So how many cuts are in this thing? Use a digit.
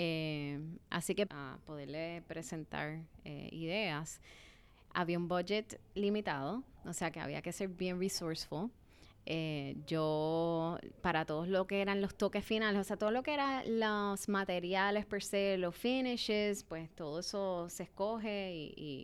1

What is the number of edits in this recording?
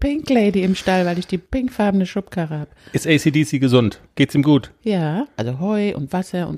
2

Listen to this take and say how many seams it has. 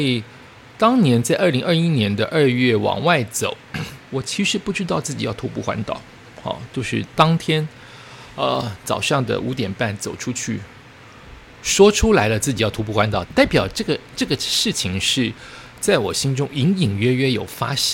2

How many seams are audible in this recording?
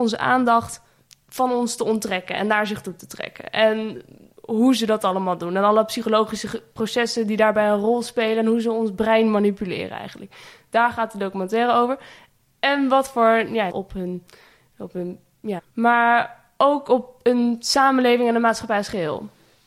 2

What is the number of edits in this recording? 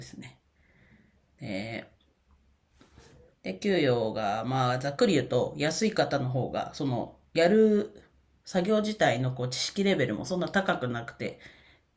1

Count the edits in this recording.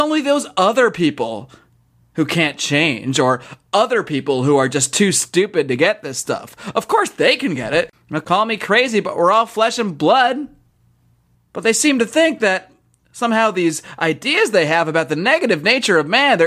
2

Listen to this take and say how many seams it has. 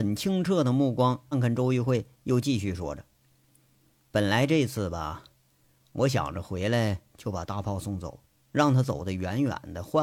1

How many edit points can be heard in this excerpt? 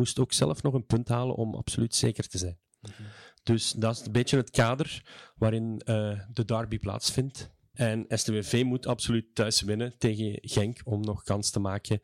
1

